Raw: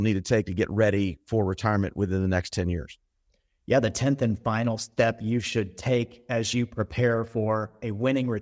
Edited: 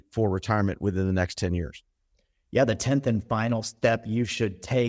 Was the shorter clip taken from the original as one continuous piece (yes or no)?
yes